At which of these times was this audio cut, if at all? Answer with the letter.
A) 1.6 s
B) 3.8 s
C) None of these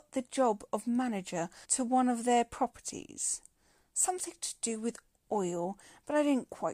A